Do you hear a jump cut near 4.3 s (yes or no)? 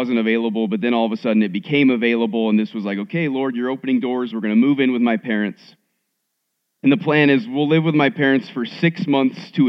yes